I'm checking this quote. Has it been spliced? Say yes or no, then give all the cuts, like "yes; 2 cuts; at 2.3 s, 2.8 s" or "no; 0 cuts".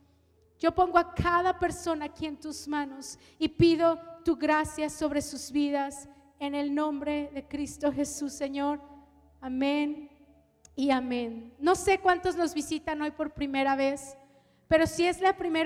no; 0 cuts